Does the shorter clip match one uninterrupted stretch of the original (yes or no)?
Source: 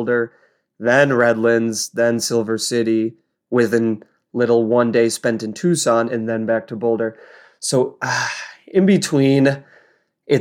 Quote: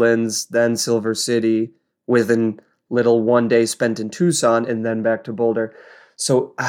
yes